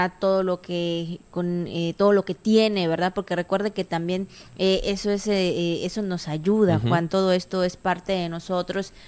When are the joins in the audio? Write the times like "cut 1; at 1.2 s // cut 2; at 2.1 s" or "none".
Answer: none